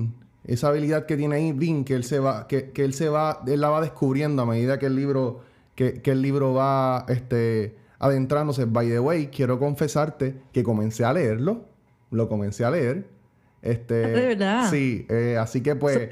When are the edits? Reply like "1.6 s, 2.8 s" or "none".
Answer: none